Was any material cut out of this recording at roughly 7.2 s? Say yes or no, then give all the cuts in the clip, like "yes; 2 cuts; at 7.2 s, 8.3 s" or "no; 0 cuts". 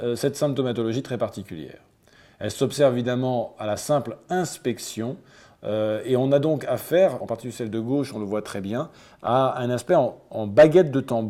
yes; 1 cut; at 7.2 s